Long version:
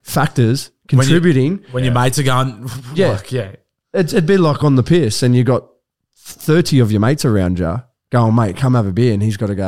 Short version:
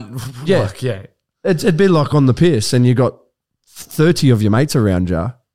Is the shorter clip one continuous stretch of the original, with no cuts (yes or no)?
yes